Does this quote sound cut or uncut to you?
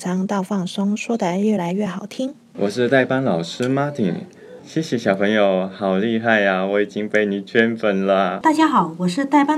uncut